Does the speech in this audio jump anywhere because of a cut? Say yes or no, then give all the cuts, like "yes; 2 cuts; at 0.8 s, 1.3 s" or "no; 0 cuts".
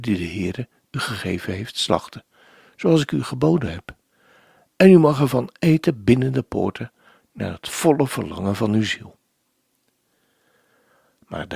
no; 0 cuts